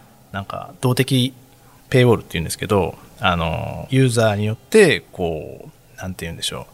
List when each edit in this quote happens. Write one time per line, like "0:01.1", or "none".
0:03.9